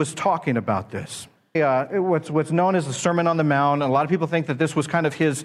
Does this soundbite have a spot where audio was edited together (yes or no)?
yes